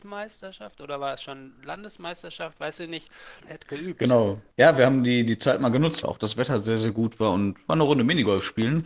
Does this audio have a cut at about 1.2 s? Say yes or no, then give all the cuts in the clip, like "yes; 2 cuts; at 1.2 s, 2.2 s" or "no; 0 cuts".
no; 2 cuts; at 3.4 s, 6.0 s